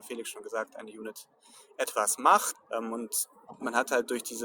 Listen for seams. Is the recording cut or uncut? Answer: cut